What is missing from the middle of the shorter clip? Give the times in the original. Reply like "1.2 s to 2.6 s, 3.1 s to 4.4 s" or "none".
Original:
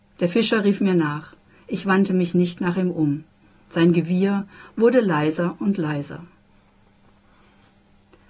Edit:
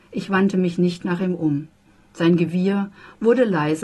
none